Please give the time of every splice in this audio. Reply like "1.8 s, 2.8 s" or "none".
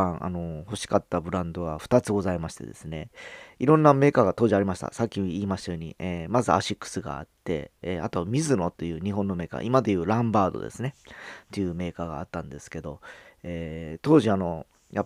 none